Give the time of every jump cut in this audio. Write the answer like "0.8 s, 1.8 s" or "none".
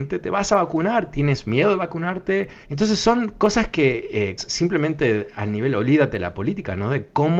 2.6 s, 4.4 s

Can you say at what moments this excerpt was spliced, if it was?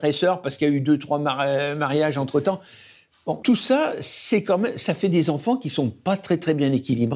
3.4 s

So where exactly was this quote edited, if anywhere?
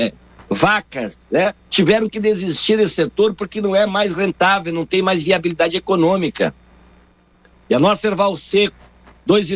7.5 s

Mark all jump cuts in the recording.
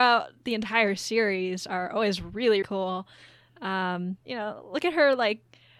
2.6 s, 4.2 s

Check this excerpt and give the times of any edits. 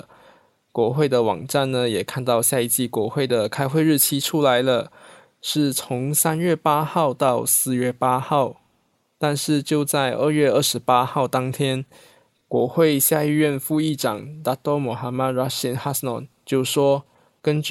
none

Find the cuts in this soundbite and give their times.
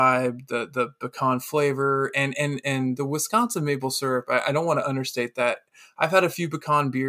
none

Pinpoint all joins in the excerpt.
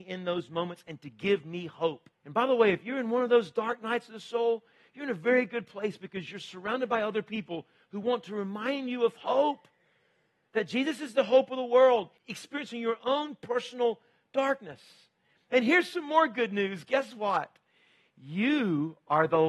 2.1 s, 12.2 s

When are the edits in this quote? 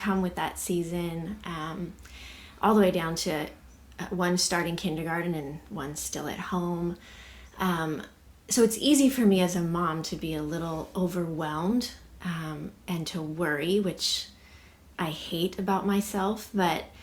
none

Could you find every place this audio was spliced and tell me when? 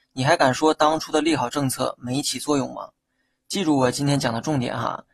none

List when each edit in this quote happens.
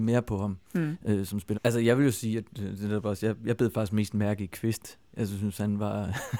1.5 s

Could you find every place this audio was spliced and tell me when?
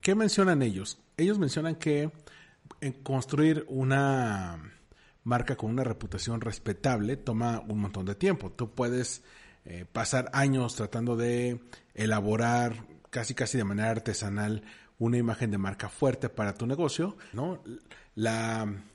17.3 s

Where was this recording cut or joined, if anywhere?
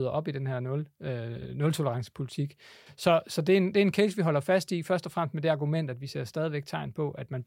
2.9 s

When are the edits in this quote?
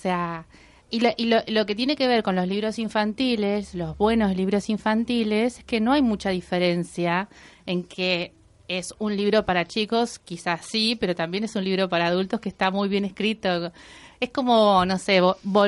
none

